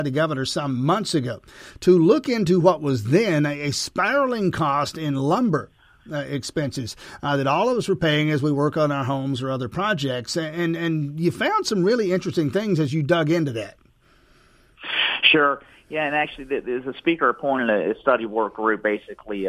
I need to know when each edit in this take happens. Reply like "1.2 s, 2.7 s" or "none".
none